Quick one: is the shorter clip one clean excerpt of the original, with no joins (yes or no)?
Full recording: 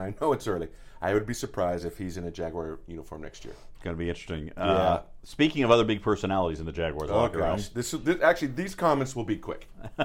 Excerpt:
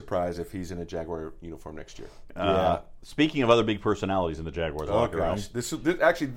no